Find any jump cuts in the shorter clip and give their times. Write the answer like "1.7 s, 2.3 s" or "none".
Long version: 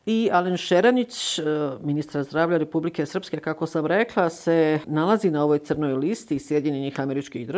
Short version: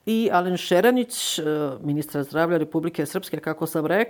none